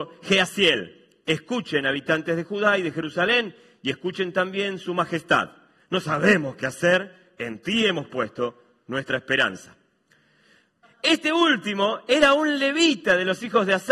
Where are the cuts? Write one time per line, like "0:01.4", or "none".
0:05.8
0:10.8